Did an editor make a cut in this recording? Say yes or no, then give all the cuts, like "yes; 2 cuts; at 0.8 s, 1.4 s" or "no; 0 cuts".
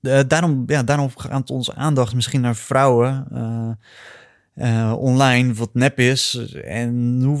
no; 0 cuts